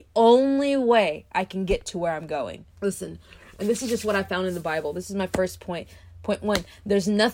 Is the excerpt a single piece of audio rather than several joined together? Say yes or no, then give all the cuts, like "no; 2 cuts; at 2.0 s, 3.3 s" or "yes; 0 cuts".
no; 1 cut; at 2.7 s